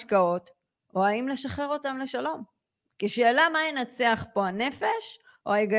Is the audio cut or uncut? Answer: uncut